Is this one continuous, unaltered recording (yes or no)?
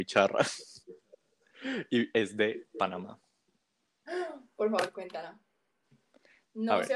yes